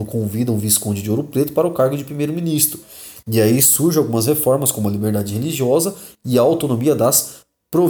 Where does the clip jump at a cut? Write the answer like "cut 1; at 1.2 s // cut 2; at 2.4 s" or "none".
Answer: none